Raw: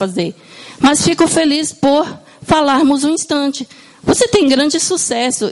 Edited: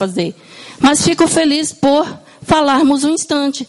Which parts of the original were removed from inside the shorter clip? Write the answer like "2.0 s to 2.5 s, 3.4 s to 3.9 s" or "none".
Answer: none